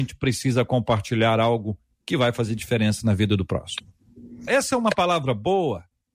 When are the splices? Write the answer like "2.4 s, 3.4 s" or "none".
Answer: 4.5 s